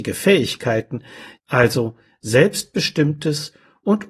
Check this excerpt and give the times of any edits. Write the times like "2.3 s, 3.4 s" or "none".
1.4 s